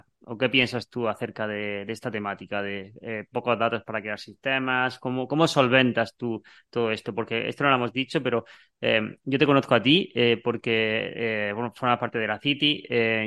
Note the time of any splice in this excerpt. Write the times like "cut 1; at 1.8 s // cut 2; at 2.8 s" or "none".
none